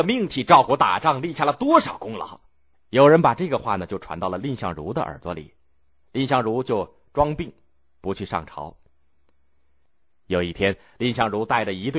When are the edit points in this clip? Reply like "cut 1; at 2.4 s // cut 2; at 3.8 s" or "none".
cut 1; at 2.7 s